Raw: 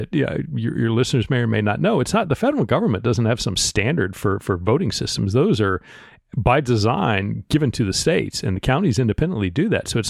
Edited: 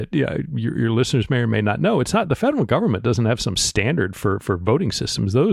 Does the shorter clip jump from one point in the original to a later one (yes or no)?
no